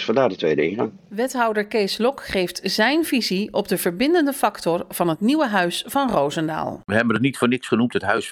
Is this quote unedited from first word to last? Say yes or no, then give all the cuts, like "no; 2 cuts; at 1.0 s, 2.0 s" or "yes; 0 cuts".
yes; 0 cuts